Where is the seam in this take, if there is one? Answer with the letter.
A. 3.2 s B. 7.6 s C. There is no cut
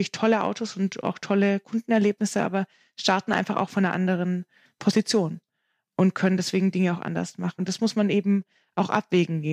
B